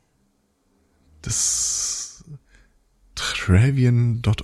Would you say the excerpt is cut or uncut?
uncut